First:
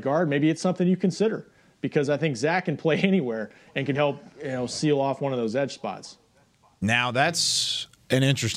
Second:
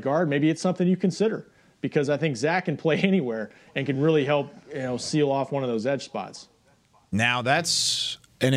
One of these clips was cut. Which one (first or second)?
first